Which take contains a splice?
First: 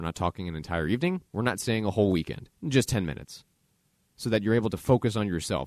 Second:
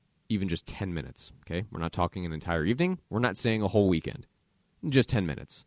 first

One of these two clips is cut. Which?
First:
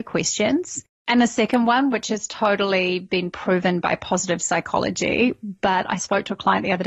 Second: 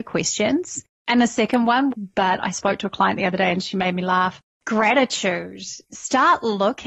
second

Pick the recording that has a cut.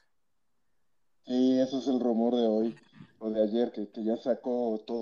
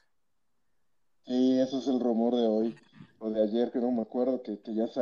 first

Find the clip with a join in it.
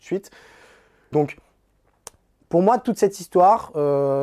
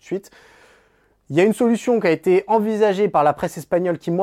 first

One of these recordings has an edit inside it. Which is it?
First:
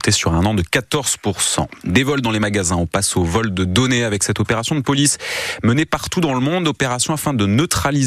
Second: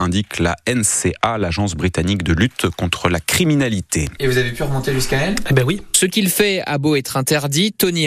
second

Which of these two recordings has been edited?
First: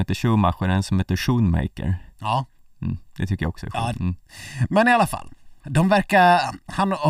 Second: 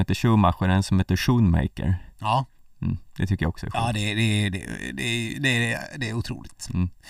first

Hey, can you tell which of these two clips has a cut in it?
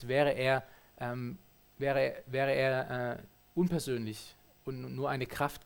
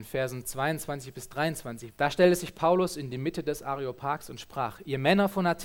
second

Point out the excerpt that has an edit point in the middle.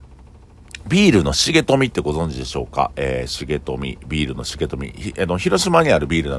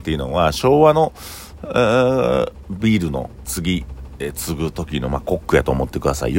second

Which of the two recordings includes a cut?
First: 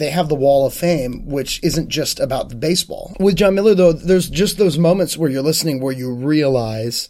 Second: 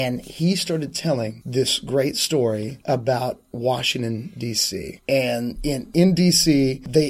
first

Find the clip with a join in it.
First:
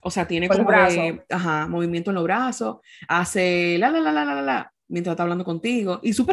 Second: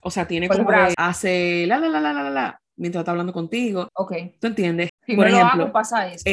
second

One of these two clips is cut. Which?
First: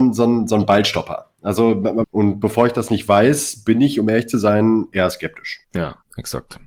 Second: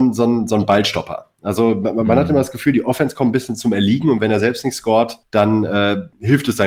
first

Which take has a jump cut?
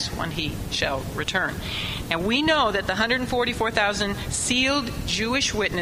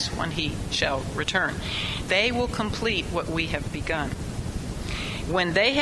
second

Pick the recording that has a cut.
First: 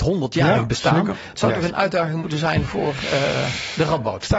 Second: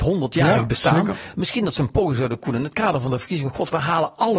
first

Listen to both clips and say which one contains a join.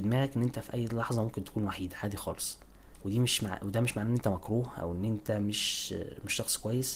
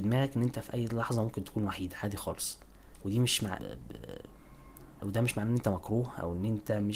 second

